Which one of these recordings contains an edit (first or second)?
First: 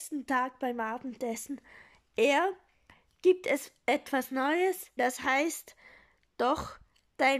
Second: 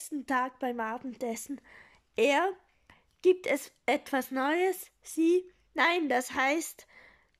first